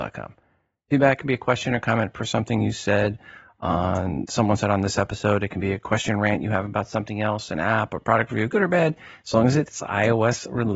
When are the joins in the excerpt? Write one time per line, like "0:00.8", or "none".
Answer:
none